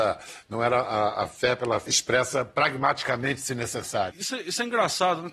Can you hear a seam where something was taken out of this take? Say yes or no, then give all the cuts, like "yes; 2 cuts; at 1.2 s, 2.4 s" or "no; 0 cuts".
yes; 2 cuts; at 1.9 s, 4.1 s